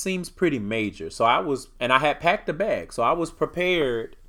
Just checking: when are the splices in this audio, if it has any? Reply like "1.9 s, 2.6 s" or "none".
1.7 s